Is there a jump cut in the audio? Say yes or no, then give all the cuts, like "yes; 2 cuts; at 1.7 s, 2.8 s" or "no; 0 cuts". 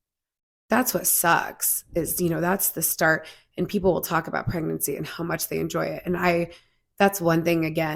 no; 0 cuts